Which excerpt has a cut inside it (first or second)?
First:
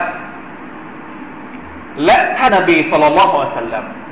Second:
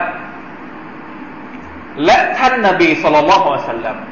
first